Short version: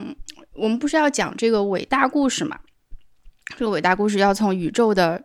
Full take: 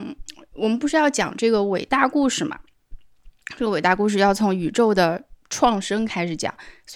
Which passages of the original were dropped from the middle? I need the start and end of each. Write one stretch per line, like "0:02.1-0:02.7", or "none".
none